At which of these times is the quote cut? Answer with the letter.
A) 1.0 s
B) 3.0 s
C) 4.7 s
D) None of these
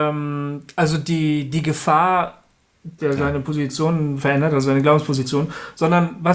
B